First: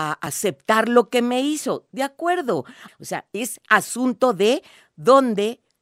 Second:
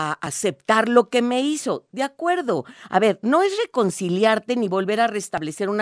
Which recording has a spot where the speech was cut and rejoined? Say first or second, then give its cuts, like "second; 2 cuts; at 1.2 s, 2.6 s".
first; 1 cut; at 2.9 s